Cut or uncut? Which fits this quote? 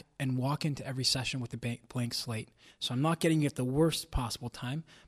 cut